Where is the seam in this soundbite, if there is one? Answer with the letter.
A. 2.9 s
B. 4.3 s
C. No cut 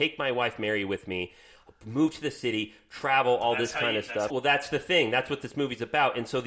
B